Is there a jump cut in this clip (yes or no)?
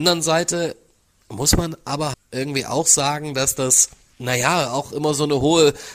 yes